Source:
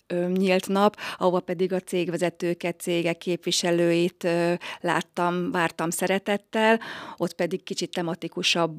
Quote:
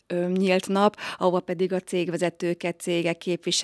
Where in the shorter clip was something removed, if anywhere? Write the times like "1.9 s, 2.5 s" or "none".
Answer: none